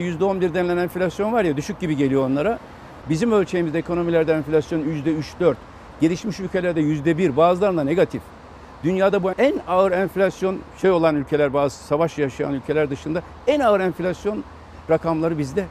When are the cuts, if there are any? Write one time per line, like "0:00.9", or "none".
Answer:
0:03.0
0:09.3

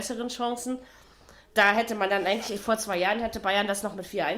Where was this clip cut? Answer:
none

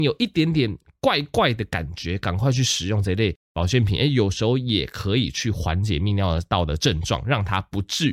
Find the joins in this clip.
none

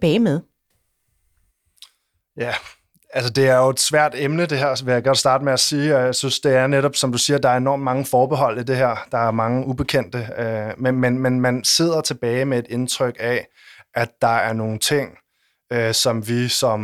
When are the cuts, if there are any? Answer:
none

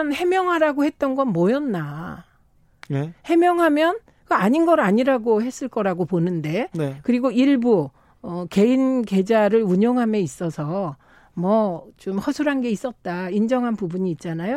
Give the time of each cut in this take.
none

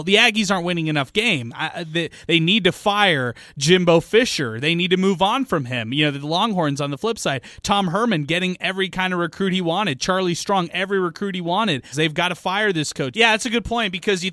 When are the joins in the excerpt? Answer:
0:11.9
0:13.1

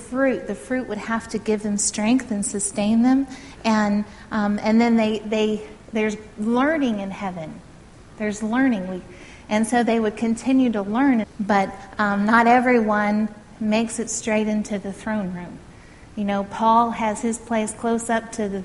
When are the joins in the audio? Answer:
0:11.2
0:13.6

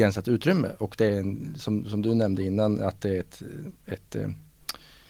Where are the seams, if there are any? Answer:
none

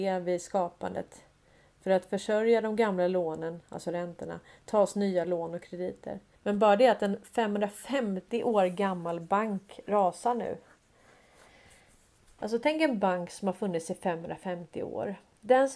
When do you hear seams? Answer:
0:06.3

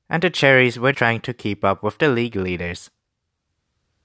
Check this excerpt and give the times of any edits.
0:00.9

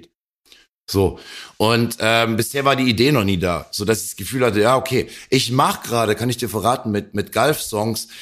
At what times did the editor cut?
none

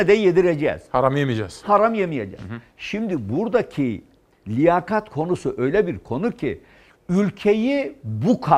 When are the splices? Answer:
none

